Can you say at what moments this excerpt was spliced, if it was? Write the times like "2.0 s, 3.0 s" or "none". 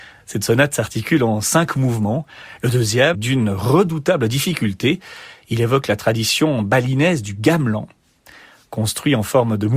3.1 s

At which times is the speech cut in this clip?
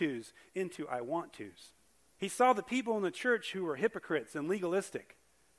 2.1 s

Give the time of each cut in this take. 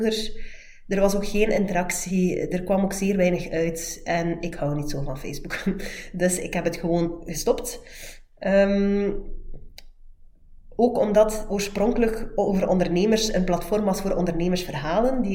none

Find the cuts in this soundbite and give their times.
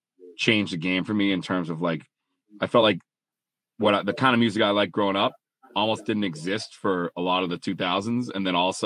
none

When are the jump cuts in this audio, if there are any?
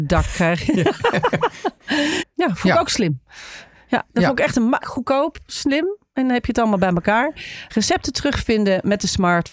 2.2 s, 4.8 s, 7.7 s

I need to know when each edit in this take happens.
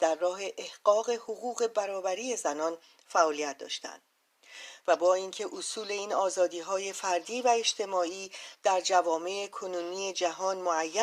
4.8 s

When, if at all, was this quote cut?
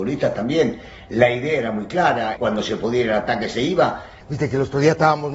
2.4 s, 4.2 s

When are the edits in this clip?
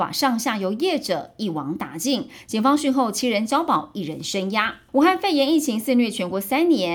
4.9 s

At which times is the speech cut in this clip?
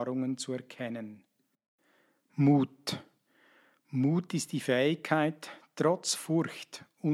none

